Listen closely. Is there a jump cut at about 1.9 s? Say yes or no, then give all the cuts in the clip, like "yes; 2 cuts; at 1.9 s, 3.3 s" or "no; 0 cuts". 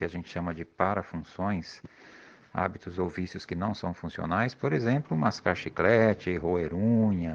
no; 0 cuts